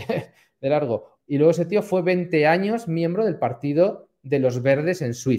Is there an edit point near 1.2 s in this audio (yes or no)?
yes